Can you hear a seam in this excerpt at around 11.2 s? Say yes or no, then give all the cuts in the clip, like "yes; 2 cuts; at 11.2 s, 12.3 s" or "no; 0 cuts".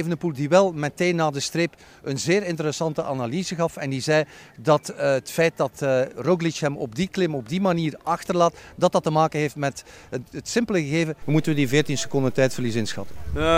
yes; 1 cut; at 11.2 s